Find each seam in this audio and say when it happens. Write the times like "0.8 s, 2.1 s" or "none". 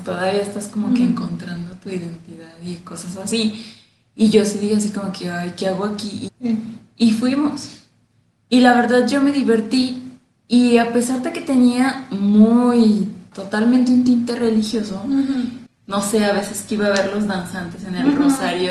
6.3 s, 13.3 s, 15.7 s